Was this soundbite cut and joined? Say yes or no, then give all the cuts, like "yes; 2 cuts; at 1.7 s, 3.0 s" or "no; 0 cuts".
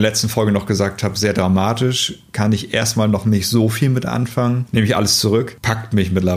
no; 0 cuts